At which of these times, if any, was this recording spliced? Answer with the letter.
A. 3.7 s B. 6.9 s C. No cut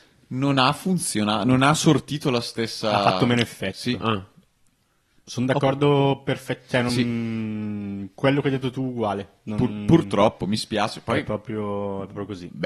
C